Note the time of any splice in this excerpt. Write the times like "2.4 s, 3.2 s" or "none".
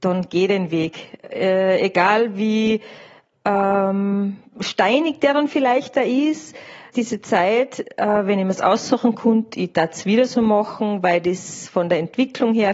6.9 s